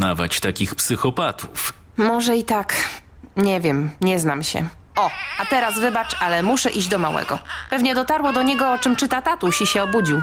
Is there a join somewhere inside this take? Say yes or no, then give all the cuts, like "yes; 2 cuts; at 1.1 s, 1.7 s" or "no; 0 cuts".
yes; 1 cut; at 4.9 s